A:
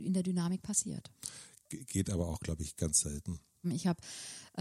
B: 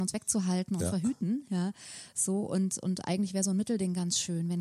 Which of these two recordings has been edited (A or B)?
A